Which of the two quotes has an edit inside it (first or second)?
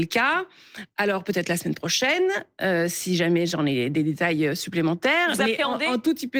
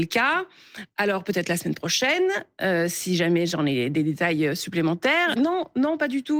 second